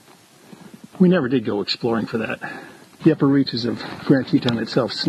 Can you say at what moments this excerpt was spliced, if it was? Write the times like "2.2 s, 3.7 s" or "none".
0.9 s, 3.0 s

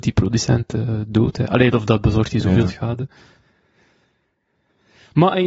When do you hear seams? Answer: none

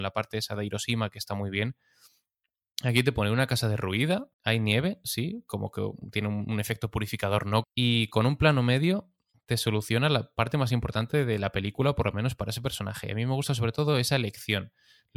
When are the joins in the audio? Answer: 4.3 s, 7.6 s

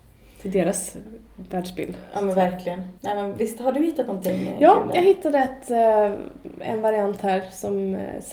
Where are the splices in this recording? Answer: 3.0 s

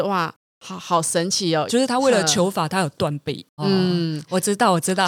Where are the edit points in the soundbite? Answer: 1.7 s, 3.6 s

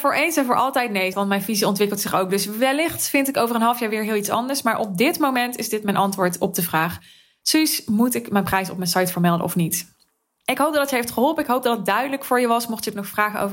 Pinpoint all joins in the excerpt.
1.1 s

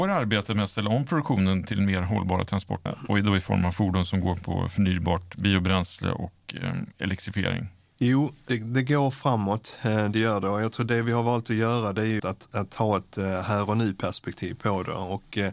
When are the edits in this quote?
2.9 s, 12.2 s

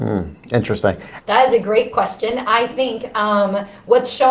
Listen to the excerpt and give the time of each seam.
1.2 s

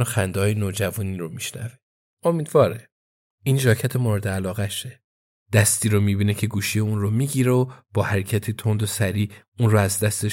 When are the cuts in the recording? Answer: 2.1 s, 5.4 s

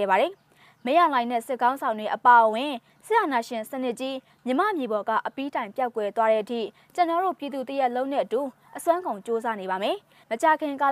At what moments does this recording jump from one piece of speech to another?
none

